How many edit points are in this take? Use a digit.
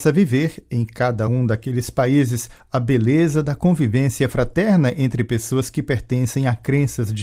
0